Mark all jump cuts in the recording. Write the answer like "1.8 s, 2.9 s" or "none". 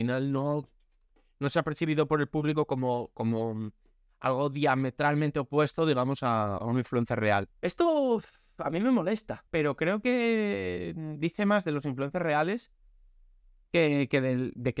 7.5 s, 9.5 s